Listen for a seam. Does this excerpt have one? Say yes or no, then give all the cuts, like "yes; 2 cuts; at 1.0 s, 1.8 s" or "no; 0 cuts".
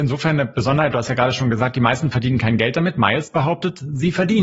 no; 0 cuts